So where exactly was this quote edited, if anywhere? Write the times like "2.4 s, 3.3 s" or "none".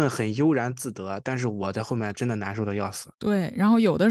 3.1 s